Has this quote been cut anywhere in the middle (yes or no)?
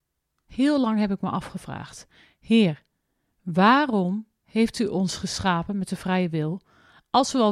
no